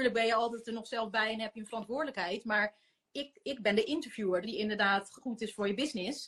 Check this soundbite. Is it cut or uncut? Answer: cut